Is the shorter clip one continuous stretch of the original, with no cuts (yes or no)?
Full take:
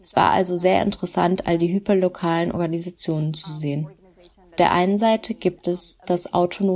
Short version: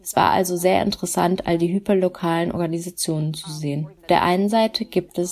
no